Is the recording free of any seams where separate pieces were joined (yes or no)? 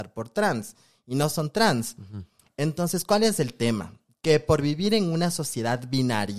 yes